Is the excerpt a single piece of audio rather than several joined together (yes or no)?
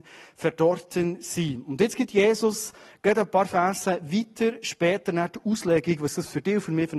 yes